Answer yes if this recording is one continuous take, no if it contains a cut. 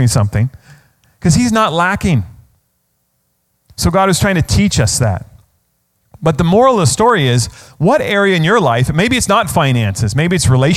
yes